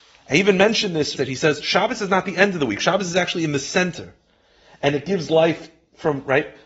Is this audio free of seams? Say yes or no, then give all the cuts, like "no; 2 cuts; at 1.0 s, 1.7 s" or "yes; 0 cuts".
no; 1 cut; at 1.2 s